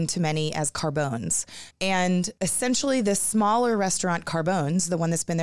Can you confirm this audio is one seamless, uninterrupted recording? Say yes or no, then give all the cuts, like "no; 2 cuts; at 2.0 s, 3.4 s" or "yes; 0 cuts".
no; 1 cut; at 1.7 s